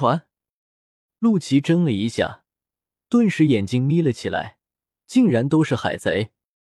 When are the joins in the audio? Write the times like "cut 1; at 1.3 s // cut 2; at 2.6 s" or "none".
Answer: cut 1; at 5.0 s